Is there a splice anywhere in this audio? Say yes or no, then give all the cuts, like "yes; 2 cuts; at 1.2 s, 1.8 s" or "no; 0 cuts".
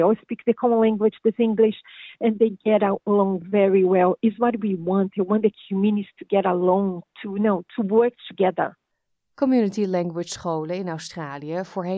no; 0 cuts